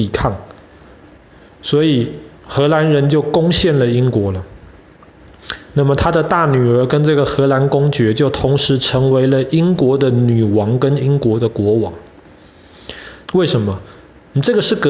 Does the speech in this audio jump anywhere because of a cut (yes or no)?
yes